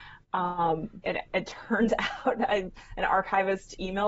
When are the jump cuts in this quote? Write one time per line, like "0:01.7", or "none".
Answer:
0:01.0